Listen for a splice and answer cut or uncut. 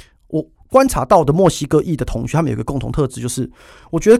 uncut